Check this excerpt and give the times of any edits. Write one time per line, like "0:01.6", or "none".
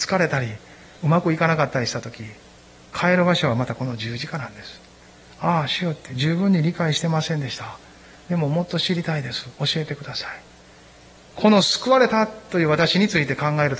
0:11.3